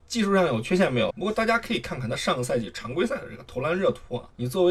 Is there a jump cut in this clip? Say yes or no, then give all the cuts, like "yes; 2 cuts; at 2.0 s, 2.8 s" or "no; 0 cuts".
yes; 1 cut; at 1.1 s